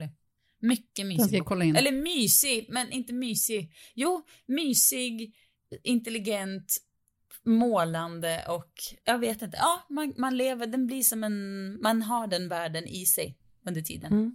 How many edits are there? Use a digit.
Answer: 1